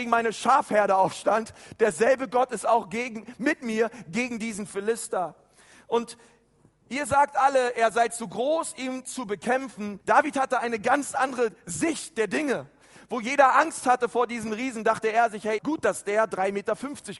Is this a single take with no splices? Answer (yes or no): no